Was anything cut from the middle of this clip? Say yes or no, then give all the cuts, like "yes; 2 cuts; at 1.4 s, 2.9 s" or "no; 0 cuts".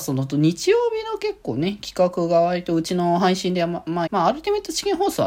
yes; 1 cut; at 4.1 s